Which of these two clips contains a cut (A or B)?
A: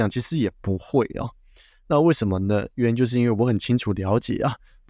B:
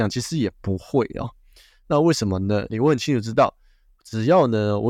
B